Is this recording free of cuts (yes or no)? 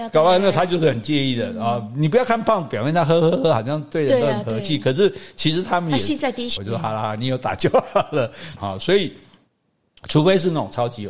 no